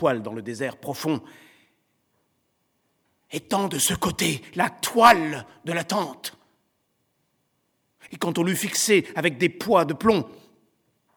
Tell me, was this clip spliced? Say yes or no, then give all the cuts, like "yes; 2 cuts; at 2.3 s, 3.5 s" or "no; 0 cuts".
yes; 1 cut; at 8.1 s